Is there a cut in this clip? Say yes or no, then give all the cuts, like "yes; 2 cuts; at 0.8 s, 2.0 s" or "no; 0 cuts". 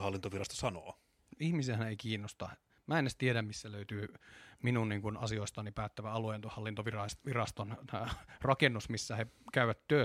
yes; 1 cut; at 1.4 s